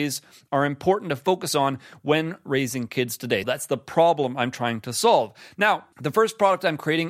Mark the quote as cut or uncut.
cut